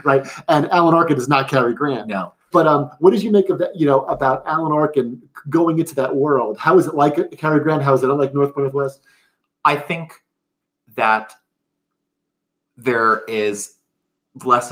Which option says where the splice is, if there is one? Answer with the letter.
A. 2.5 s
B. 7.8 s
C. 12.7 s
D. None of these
A